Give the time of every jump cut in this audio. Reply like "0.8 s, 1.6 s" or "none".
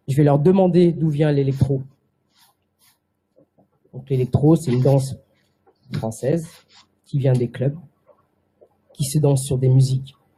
none